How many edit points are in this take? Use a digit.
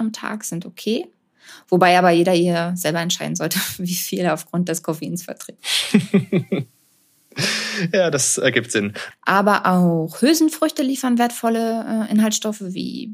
1